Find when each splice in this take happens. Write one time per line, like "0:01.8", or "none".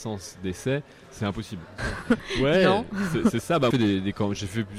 0:01.8
0:03.7